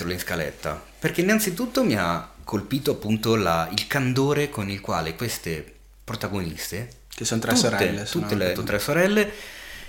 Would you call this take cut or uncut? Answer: cut